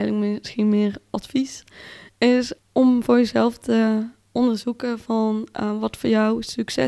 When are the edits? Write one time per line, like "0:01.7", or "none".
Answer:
0:02.6